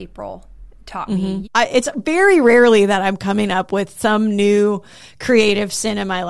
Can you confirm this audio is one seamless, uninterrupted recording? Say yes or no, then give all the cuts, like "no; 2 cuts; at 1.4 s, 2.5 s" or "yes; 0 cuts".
no; 1 cut; at 1.4 s